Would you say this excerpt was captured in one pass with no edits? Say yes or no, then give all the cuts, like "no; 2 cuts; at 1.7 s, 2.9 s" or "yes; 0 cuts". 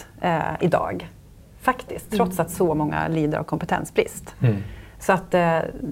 yes; 0 cuts